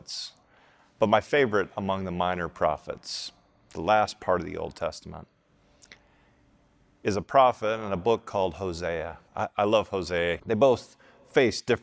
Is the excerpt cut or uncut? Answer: cut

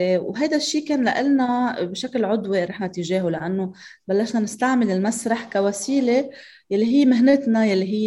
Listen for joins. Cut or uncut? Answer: cut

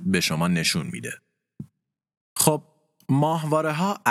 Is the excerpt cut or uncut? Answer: cut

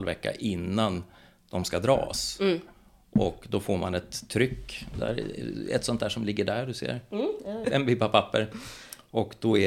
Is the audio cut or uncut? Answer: cut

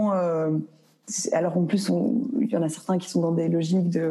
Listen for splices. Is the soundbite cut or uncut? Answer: uncut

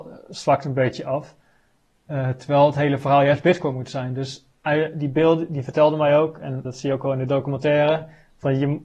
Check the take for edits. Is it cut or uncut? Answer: cut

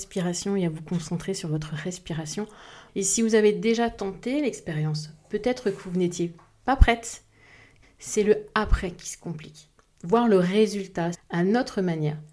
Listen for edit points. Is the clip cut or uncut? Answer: cut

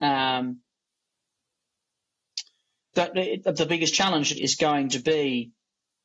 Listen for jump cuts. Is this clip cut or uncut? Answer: cut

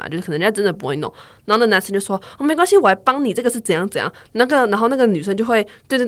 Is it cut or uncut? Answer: uncut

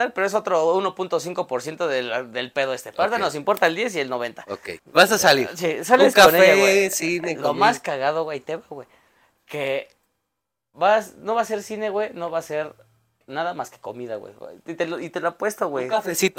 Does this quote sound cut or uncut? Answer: cut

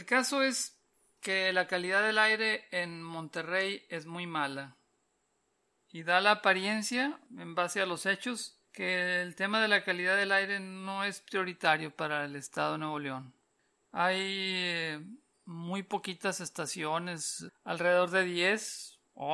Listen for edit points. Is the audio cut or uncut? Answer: cut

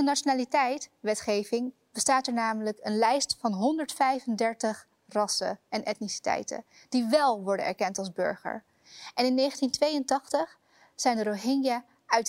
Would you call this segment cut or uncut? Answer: uncut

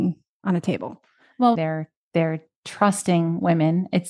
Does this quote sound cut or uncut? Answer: cut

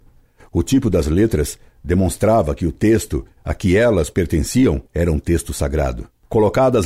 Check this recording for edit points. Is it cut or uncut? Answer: cut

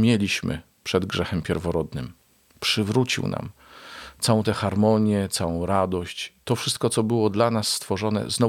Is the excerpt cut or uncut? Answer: uncut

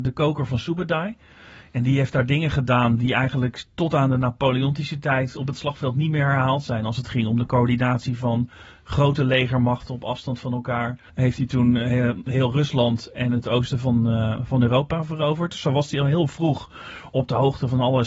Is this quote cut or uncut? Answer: cut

